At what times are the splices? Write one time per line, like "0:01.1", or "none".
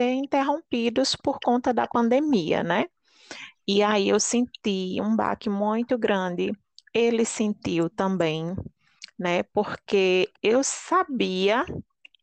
none

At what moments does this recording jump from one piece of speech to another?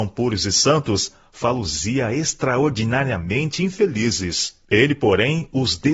0:04.6

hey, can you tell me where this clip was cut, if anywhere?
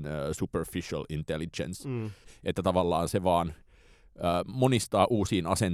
0:02.2

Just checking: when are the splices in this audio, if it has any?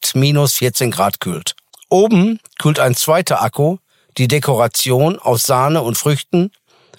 none

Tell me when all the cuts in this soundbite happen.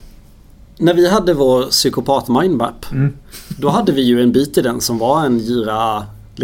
none

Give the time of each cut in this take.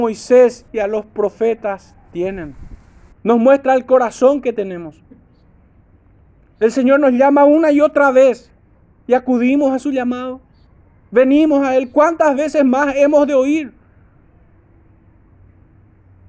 0:03.1

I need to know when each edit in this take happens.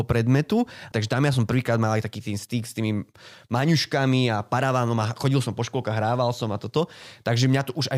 0:00.9

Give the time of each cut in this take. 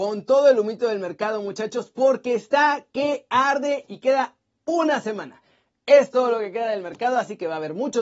none

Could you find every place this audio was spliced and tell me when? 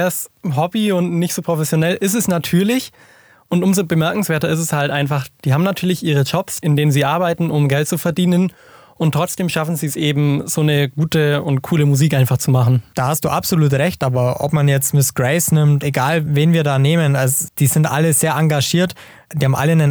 0:15.8

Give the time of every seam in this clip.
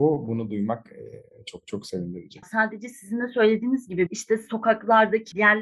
0:02.4

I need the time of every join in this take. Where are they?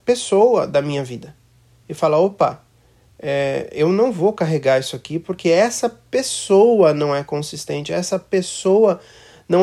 none

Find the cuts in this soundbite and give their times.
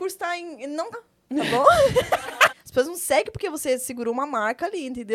0:00.9
0:02.5

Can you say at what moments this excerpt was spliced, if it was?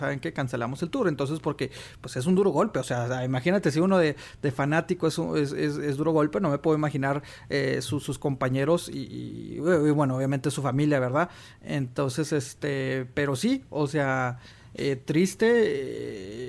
none

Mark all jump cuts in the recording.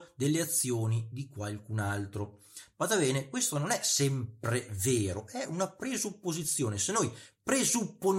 none

